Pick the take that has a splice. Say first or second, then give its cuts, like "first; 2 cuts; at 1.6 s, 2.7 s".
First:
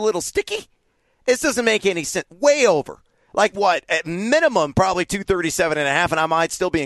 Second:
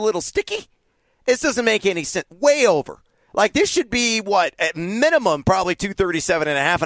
first; 1 cut; at 3.5 s